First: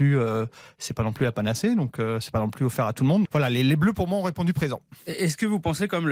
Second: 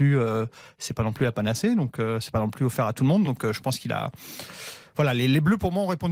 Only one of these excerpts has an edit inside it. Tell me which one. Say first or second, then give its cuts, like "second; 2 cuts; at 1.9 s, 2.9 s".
first; 1 cut; at 3.3 s